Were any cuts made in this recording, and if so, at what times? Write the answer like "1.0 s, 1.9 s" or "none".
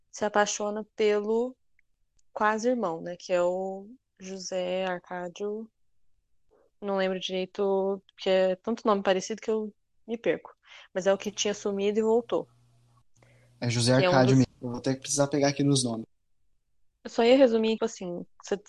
14.4 s, 17.8 s